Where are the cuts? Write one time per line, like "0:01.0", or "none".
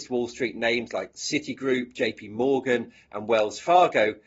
none